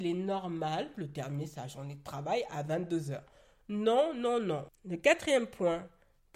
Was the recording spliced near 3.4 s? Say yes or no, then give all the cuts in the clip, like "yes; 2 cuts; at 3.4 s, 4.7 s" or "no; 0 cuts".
no; 2 cuts; at 0.9 s, 4.7 s